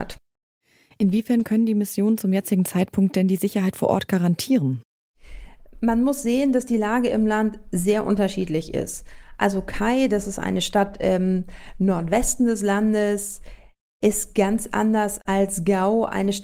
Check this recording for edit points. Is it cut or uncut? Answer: uncut